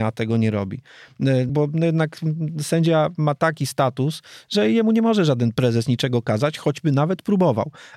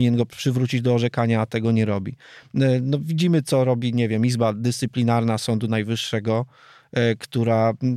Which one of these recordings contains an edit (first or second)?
first